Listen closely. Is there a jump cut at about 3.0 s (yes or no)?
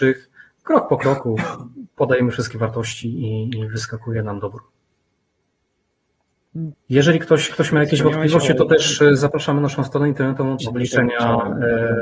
no